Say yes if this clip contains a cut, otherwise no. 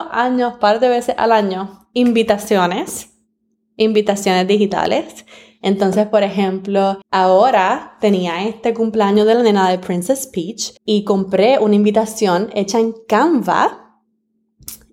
yes